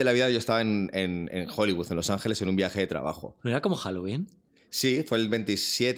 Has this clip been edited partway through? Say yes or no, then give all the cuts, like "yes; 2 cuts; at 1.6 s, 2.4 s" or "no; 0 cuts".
no; 0 cuts